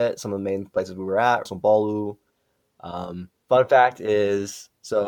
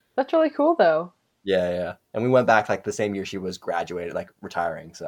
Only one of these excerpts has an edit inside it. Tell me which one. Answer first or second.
first